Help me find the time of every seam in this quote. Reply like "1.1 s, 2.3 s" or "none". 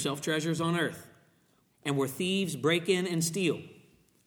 1.6 s

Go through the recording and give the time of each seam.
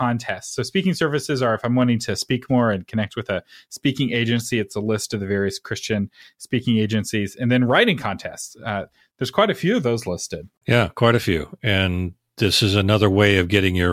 none

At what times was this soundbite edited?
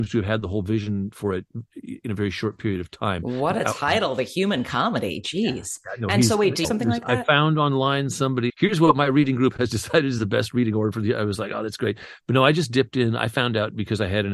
6.6 s, 8.5 s

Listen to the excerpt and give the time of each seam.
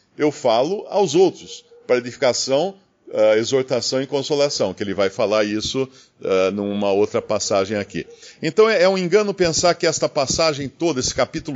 none

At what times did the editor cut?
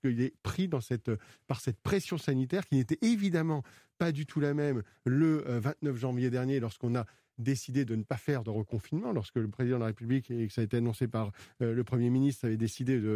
none

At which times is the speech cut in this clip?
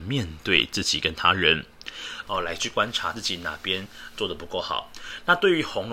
2.2 s

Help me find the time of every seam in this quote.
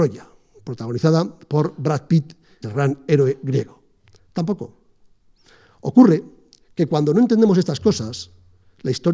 2.6 s, 4.2 s

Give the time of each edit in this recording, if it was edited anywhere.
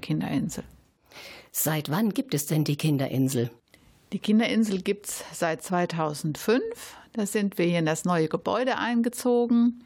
none

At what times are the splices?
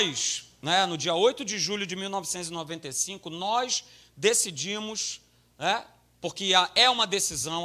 none

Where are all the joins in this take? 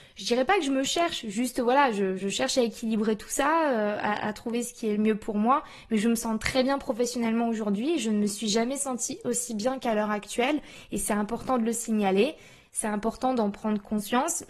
none

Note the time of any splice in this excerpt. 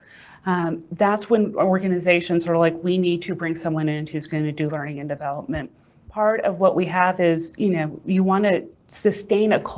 none

